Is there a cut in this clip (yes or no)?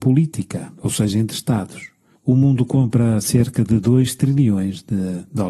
no